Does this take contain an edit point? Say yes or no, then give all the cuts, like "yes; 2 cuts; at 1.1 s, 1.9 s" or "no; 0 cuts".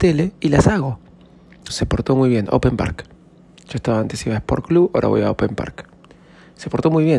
yes; 1 cut; at 1.7 s